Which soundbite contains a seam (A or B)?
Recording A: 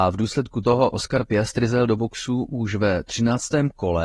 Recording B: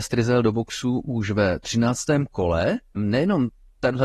B